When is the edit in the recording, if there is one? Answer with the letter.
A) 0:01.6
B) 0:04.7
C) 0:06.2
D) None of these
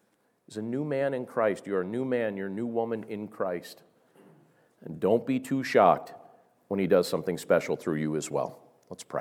D